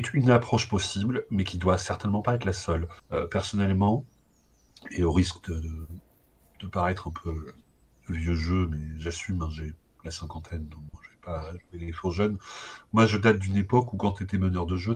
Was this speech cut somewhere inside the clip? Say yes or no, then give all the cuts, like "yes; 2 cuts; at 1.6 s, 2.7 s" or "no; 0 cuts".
no; 0 cuts